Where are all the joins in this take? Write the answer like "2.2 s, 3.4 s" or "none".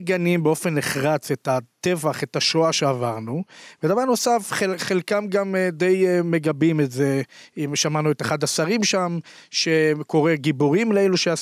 none